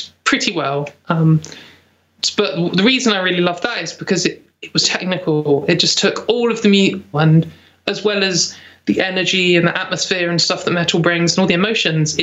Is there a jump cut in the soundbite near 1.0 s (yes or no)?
no